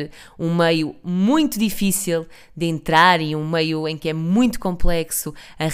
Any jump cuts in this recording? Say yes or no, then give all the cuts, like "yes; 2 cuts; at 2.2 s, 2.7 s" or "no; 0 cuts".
no; 0 cuts